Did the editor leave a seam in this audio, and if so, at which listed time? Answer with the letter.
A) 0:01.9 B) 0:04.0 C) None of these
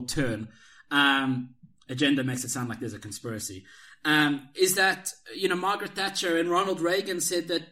C